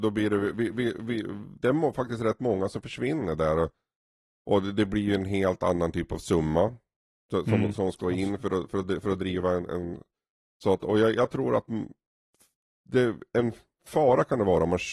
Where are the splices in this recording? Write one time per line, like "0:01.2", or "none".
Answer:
none